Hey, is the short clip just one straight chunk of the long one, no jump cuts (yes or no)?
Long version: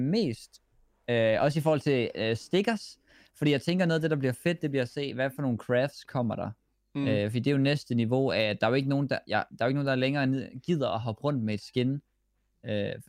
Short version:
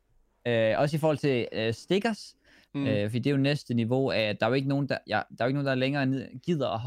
no